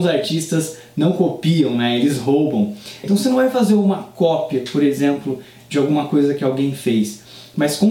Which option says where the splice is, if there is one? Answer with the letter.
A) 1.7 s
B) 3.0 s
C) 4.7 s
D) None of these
B